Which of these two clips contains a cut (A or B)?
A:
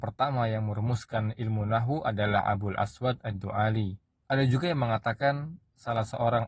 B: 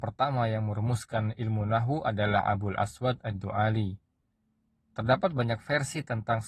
A